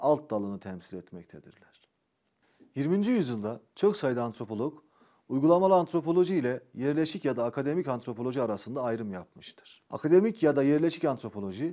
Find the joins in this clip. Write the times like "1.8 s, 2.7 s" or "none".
9.9 s